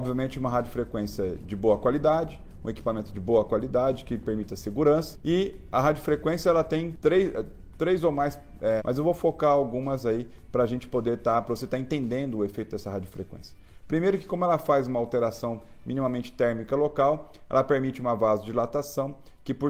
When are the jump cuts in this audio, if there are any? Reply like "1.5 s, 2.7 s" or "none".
8.8 s

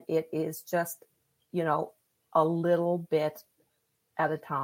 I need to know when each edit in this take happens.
none

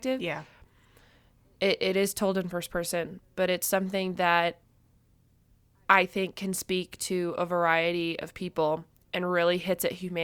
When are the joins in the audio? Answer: none

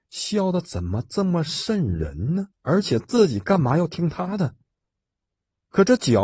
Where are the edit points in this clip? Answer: 2.5 s

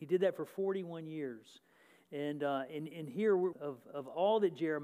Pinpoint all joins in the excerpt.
3.5 s

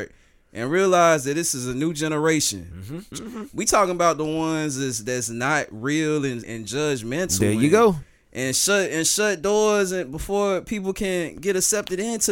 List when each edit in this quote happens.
3.1 s, 6.4 s

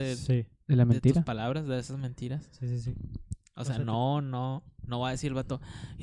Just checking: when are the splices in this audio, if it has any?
none

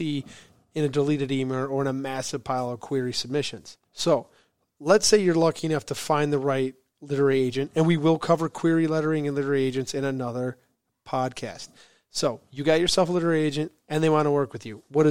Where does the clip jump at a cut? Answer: 3.8 s, 13.8 s

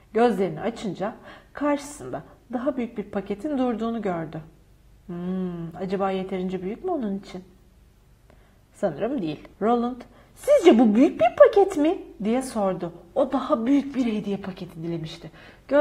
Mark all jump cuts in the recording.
9.5 s

